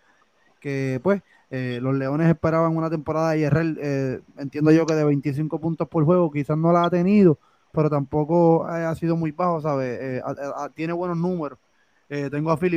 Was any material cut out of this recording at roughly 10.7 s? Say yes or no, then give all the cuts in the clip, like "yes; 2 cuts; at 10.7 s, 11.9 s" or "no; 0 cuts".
no; 0 cuts